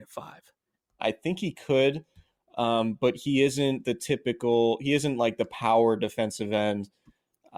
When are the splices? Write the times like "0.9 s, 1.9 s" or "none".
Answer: 1.0 s